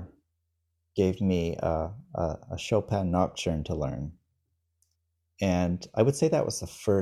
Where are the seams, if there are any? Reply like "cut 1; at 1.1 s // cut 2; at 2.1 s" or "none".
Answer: none